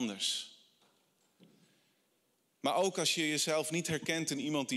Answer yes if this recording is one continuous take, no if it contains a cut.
yes